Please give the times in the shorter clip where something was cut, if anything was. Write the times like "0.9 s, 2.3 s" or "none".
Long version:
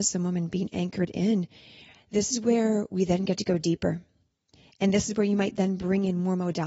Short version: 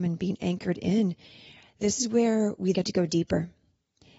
2.7 s